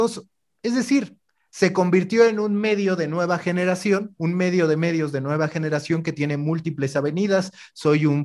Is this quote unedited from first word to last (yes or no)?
yes